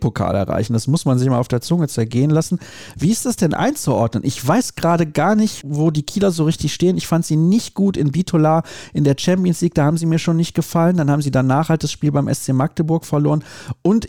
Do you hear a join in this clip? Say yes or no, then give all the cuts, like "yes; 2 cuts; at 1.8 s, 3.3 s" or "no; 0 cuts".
no; 0 cuts